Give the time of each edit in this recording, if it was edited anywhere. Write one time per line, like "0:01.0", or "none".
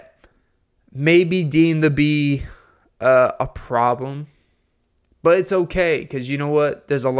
none

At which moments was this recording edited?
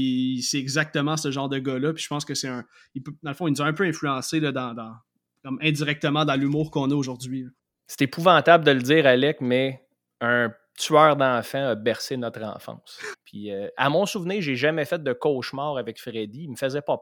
0:13.1

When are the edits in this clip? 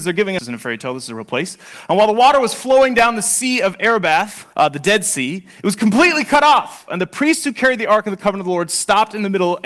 0:04.5
0:06.9

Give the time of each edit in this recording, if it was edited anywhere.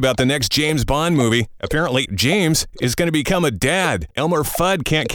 0:02.1
0:04.1

